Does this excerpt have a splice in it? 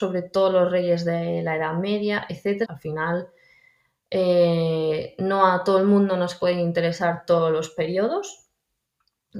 yes; 1 cut; at 2.6 s

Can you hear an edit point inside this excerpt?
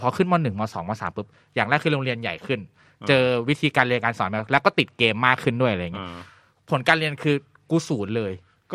no; 0 cuts

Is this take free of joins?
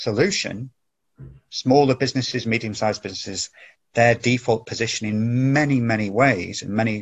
yes; 0 cuts

